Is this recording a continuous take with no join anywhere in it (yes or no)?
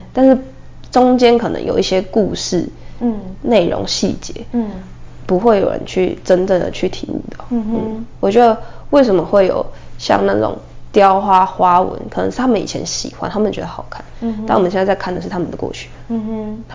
yes